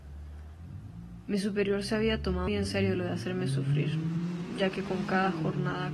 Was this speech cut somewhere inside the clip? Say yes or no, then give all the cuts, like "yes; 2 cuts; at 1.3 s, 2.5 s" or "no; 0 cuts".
yes; 1 cut; at 2.5 s